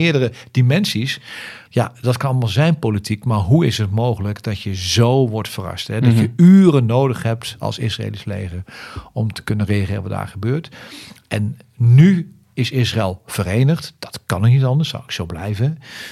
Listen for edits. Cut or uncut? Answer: cut